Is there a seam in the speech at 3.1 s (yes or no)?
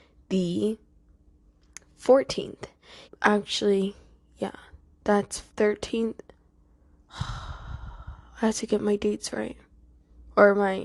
yes